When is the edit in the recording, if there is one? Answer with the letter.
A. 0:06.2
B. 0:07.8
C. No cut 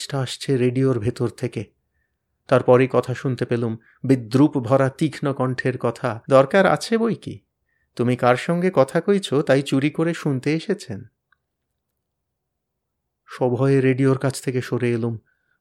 A